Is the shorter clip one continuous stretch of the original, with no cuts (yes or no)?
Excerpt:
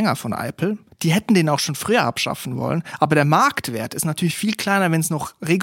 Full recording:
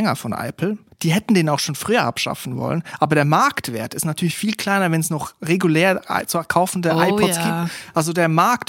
yes